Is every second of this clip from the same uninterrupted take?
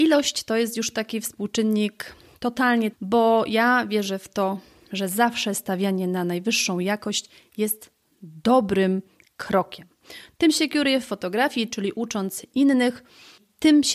no; 2 cuts; at 2.9 s, 11.7 s

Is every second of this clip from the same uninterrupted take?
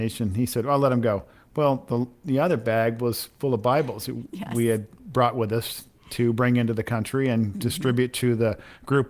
yes; 0 cuts

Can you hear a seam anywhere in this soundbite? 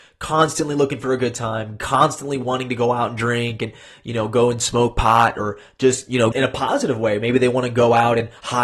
yes; 1 cut; at 6.3 s

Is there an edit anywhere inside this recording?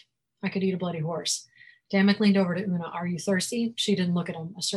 no; 0 cuts

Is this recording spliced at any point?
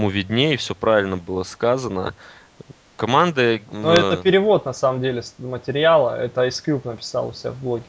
no; 0 cuts

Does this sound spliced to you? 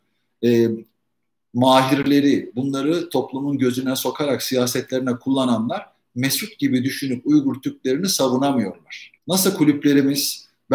yes; 1 cut; at 9.2 s

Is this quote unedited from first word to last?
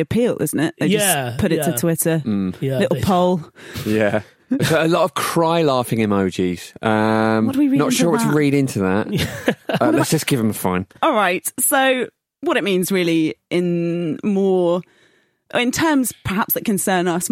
yes; 0 cuts

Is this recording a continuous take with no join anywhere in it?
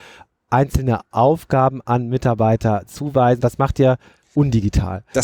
no; 1 cut; at 3.4 s

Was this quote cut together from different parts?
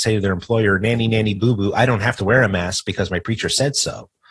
no; 0 cuts

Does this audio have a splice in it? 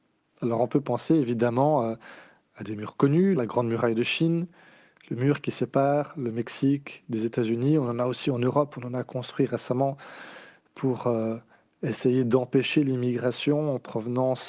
yes; 1 cut; at 3.4 s

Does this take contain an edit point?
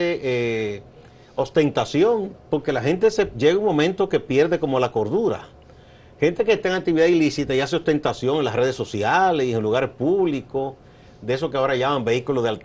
no; 0 cuts

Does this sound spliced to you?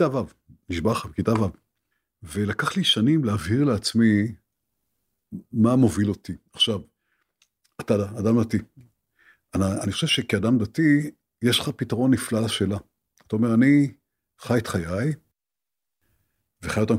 no; 0 cuts

